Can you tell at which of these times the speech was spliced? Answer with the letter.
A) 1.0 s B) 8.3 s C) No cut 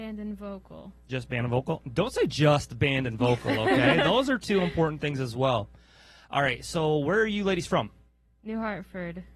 C